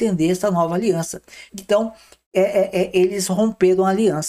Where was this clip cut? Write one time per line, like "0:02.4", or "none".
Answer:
0:01.5